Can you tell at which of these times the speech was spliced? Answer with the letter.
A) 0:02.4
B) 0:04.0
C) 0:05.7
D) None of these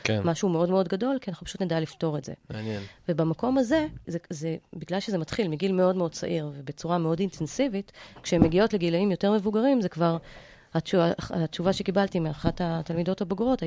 B